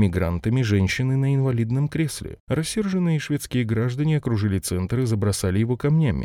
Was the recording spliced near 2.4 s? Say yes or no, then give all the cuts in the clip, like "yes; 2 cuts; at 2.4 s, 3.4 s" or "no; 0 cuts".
yes; 1 cut; at 2.4 s